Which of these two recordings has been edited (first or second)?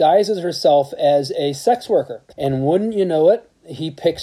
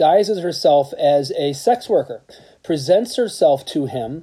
first